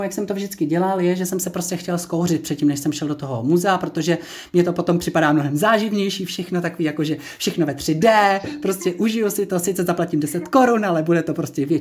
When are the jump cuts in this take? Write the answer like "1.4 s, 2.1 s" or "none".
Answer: none